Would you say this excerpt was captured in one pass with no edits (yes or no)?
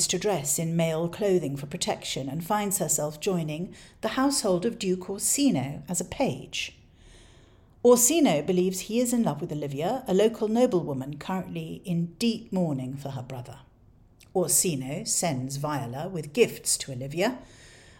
yes